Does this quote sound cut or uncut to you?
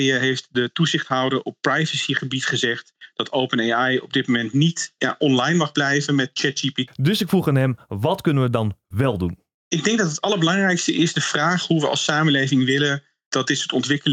cut